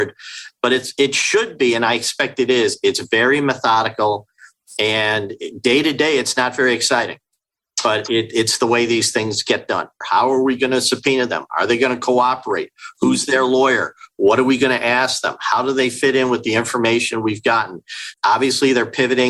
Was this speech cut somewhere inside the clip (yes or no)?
yes